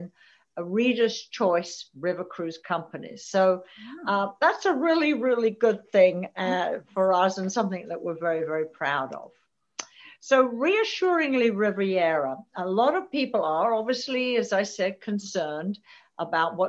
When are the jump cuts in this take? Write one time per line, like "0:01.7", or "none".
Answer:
none